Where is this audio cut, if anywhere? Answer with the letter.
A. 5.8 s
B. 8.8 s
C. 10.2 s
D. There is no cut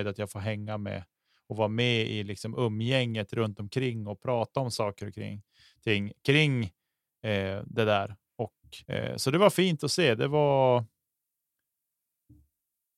B